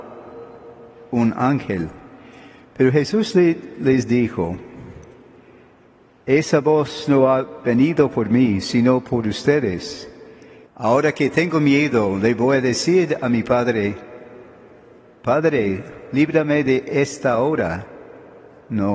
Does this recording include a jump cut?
yes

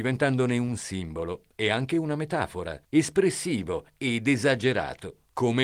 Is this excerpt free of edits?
no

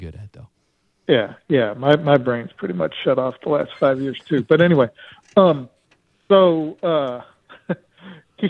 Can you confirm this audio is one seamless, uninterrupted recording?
yes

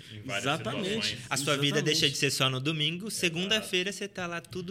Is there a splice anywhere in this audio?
no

